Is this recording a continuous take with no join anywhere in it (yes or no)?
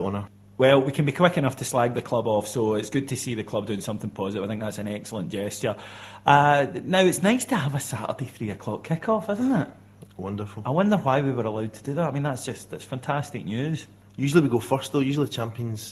yes